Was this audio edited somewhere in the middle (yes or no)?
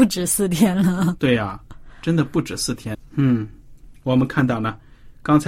yes